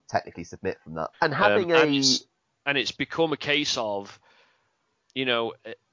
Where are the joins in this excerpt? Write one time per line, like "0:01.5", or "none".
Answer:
0:01.1